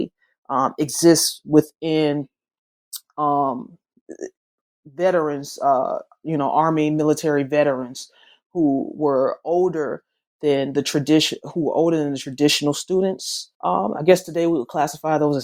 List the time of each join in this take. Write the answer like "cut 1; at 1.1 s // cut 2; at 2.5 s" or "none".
cut 1; at 13.5 s